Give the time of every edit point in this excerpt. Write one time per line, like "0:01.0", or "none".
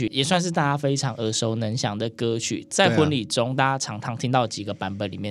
none